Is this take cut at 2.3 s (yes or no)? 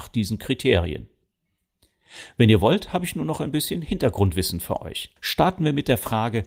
no